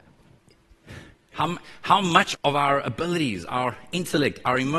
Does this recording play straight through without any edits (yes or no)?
no